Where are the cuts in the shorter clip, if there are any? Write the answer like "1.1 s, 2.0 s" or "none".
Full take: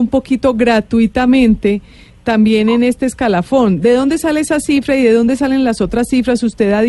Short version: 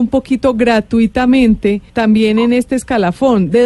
1.9 s